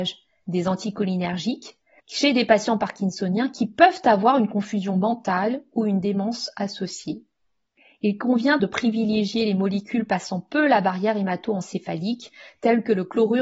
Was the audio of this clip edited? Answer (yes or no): yes